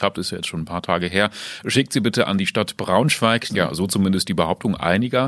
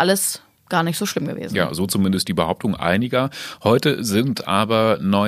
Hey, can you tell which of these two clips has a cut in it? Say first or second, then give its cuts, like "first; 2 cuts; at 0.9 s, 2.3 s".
first; 1 cut; at 3.5 s